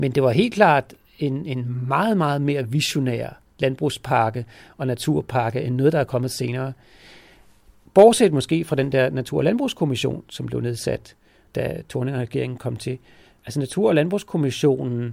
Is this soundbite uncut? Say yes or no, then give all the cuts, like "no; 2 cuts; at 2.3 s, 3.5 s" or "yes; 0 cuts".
yes; 0 cuts